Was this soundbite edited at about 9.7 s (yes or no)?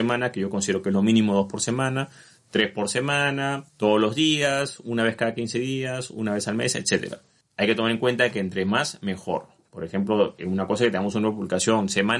no